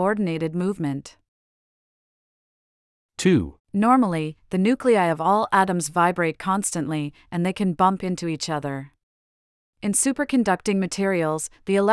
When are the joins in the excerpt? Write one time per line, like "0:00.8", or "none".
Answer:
0:03.6